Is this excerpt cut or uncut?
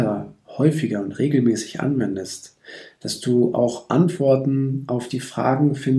uncut